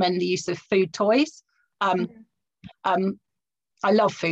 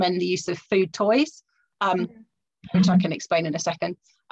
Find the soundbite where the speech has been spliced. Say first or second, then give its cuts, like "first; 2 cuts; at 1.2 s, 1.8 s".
first; 1 cut; at 2.7 s